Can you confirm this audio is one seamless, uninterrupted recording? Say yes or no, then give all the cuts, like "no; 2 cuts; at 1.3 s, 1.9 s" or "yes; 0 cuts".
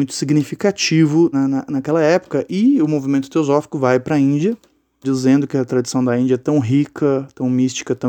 no; 2 cuts; at 1.3 s, 5.0 s